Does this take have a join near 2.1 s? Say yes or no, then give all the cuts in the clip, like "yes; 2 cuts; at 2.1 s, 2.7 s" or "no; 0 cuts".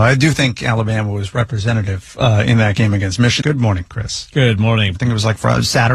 no; 2 cuts; at 3.4 s, 5.0 s